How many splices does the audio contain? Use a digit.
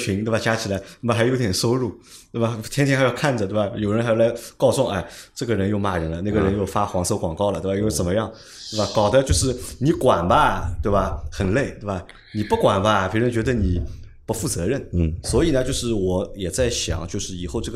0